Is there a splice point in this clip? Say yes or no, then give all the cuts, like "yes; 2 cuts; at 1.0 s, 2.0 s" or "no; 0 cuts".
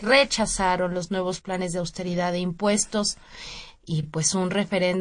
no; 0 cuts